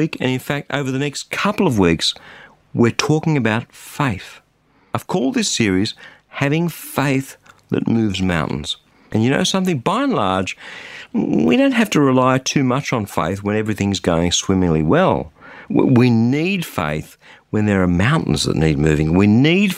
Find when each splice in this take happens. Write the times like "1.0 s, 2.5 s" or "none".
none